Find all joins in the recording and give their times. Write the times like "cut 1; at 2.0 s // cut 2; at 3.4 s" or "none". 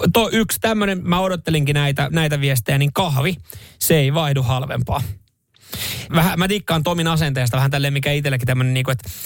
cut 1; at 2.1 s // cut 2; at 6.1 s